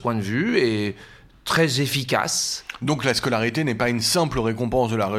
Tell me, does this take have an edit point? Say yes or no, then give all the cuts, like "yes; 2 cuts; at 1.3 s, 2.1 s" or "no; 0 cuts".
no; 0 cuts